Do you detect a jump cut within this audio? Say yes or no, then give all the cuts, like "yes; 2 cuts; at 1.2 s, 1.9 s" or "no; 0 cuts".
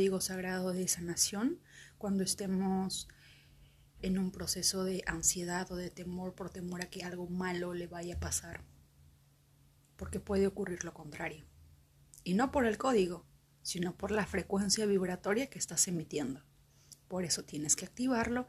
no; 0 cuts